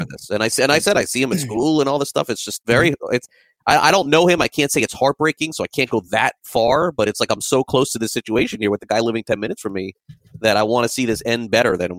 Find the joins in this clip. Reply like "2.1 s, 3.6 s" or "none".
none